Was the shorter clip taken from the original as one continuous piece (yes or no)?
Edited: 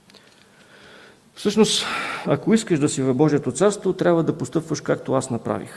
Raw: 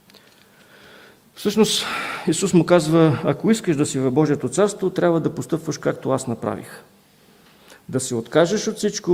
no